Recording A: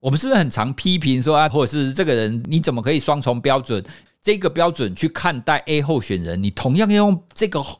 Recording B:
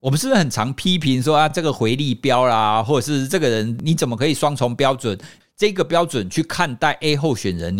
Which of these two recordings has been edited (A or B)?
A